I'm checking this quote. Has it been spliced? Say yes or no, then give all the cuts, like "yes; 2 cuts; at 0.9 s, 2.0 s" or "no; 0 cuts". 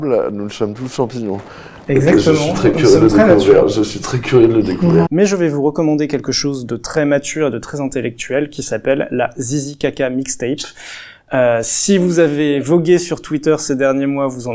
yes; 1 cut; at 5.1 s